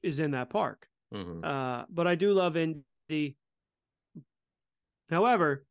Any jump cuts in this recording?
yes; 1 cut; at 4.2 s

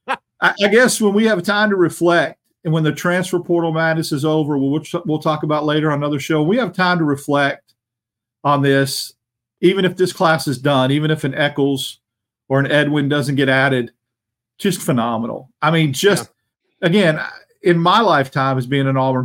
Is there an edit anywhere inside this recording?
no; 0 cuts

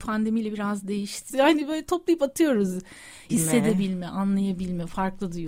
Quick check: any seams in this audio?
yes; 2 cuts; at 1.3 s, 3.3 s

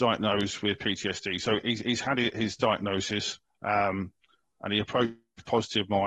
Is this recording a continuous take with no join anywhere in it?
yes; 0 cuts

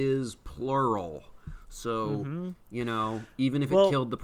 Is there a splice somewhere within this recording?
no; 0 cuts

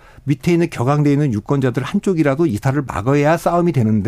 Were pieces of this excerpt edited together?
no; 0 cuts

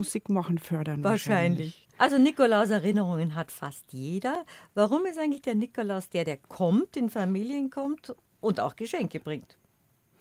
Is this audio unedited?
no; 1 cut; at 1.9 s

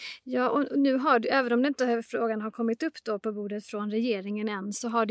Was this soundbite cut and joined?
no; 0 cuts

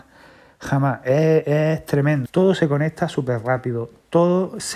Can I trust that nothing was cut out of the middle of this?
no; 1 cut; at 2.3 s

